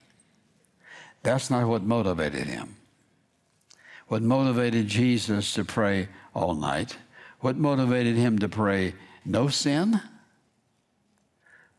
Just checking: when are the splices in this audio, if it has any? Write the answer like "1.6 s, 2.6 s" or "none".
9.2 s